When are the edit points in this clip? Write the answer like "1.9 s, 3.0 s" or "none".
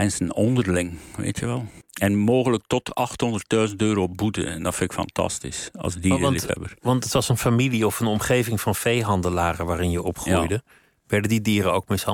1.8 s